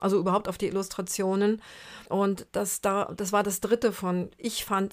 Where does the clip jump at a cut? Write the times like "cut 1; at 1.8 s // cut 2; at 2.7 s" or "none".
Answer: cut 1; at 2.1 s